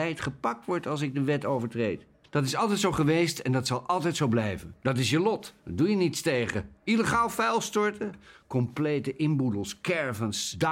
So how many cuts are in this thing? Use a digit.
2